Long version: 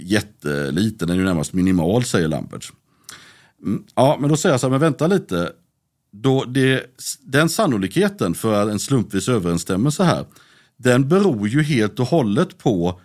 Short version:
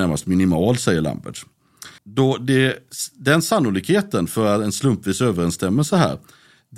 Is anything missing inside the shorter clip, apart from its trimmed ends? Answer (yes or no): yes